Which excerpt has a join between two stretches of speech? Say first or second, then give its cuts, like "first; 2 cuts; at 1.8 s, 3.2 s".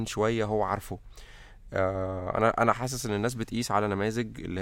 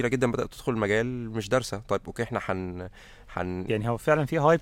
second; 1 cut; at 3.7 s